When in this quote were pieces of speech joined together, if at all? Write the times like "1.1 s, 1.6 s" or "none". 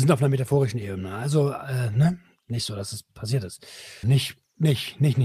4.0 s